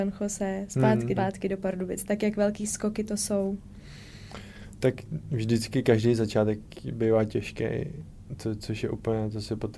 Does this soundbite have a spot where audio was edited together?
yes; 1 cut; at 1.1 s

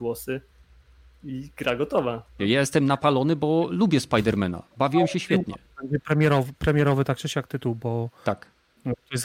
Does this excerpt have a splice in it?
yes; 1 cut; at 2.4 s

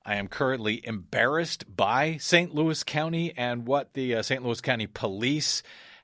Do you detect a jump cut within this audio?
no; 0 cuts

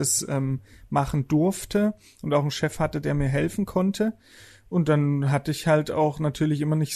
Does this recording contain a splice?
no; 0 cuts

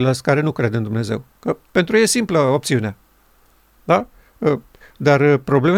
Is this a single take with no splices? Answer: no; 1 cut; at 4.8 s

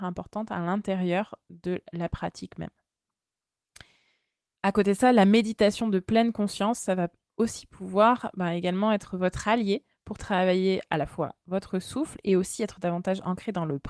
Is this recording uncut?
yes; 0 cuts

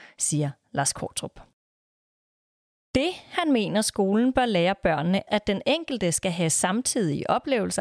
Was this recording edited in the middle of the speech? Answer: yes; 1 cut; at 5.3 s

